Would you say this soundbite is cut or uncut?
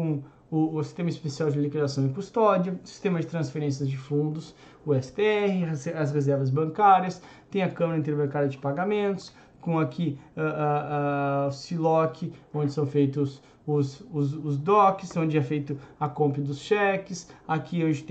uncut